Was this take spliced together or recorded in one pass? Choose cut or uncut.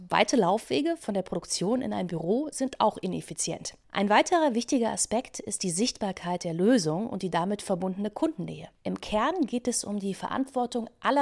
uncut